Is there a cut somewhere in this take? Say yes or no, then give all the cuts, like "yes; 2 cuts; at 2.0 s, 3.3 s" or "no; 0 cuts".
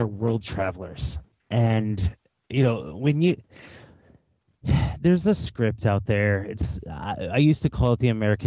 no; 0 cuts